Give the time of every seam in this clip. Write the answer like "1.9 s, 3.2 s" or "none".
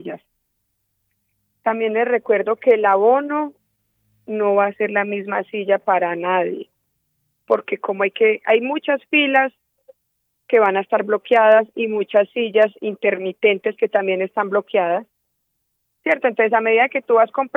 none